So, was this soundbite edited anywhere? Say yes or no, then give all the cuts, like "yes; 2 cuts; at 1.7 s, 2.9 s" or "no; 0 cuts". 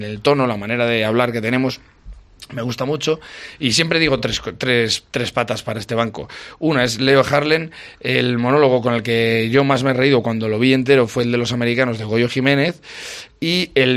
no; 0 cuts